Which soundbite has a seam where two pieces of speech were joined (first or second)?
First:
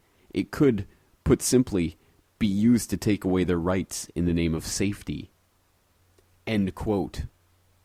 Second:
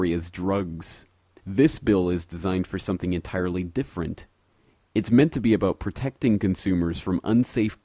second